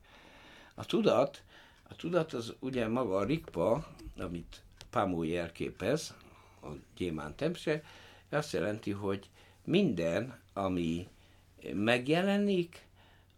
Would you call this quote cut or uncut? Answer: uncut